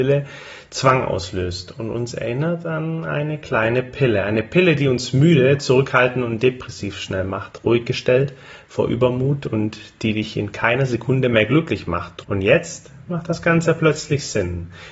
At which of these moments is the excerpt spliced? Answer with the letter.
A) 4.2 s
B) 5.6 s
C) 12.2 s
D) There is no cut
C